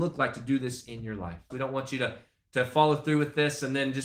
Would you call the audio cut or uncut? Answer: cut